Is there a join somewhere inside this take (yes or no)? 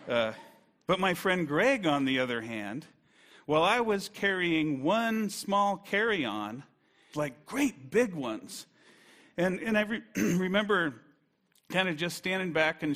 yes